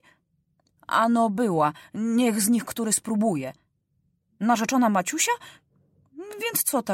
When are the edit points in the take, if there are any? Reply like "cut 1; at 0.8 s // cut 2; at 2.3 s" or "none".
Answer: none